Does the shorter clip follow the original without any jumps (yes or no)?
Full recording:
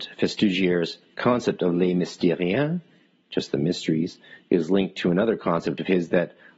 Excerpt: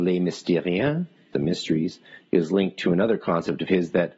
no